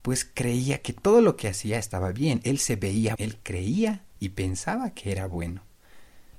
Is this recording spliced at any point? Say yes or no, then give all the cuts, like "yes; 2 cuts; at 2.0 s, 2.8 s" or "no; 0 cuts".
yes; 1 cut; at 3.2 s